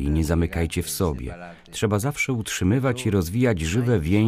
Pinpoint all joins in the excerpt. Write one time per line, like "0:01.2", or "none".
none